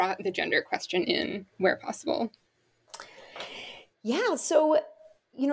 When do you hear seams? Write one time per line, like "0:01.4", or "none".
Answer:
none